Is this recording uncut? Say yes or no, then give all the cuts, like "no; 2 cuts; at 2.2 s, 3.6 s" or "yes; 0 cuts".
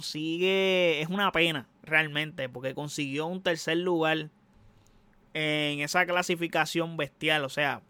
yes; 0 cuts